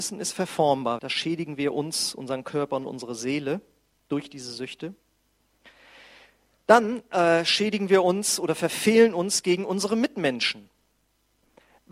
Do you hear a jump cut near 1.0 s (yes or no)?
yes